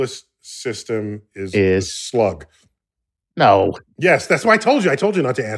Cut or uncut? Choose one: uncut